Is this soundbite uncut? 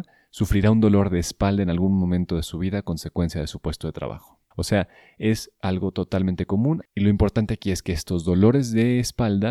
no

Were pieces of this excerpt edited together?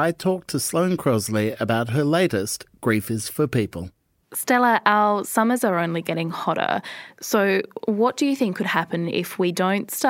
yes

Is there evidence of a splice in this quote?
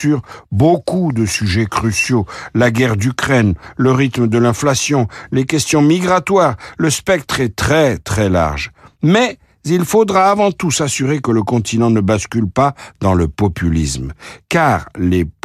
no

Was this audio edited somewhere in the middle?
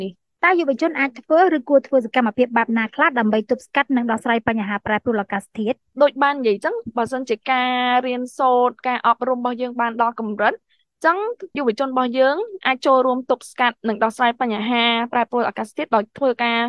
no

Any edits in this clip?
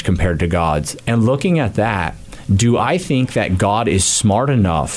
yes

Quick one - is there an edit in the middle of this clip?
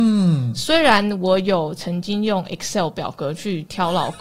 no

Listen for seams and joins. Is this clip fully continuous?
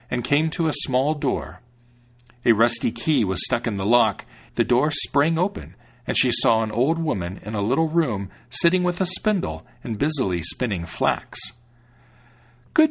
no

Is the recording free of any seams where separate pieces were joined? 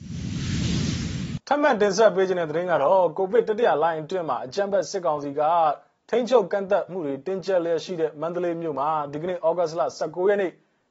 no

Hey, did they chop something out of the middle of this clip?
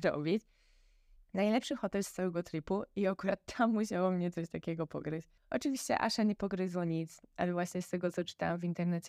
yes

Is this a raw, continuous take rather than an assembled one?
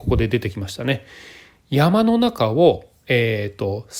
yes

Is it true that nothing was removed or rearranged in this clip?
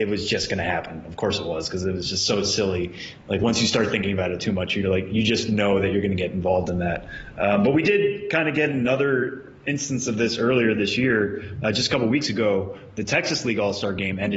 yes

